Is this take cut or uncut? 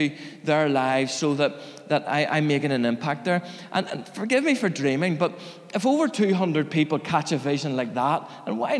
uncut